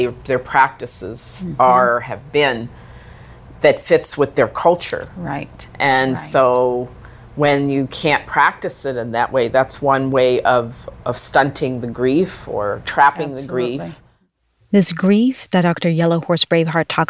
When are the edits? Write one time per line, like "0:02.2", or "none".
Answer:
none